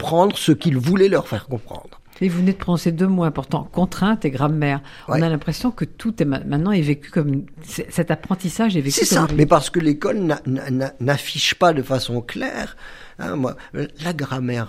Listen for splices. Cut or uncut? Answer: cut